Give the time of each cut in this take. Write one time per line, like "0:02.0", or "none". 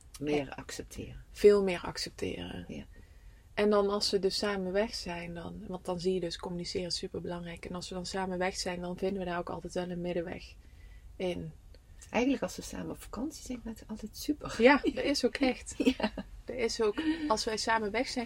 none